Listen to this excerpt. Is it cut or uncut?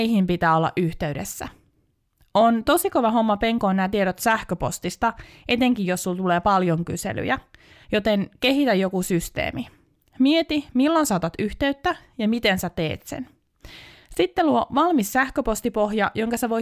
uncut